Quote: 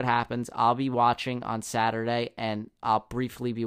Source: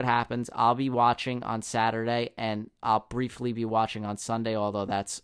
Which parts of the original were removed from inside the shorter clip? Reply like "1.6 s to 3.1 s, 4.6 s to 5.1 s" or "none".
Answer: none